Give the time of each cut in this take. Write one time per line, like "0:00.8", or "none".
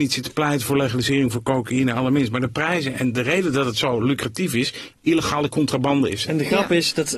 0:04.9
0:06.3

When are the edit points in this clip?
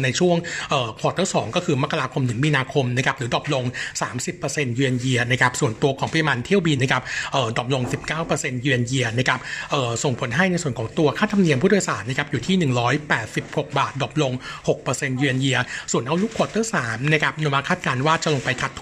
0:06.8

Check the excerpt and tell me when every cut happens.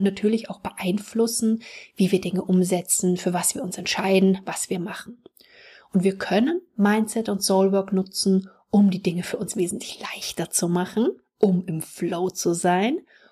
none

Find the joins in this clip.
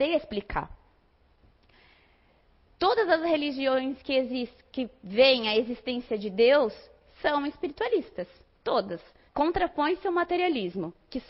0:09.3

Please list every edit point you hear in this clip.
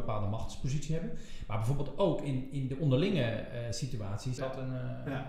0:04.4

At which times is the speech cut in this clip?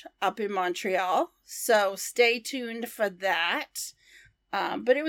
none

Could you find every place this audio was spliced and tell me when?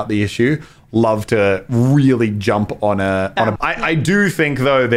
0:03.6

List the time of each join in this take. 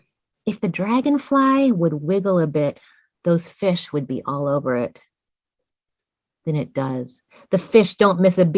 none

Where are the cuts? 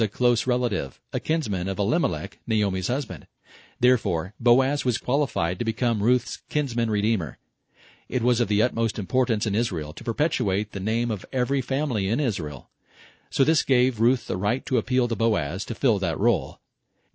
none

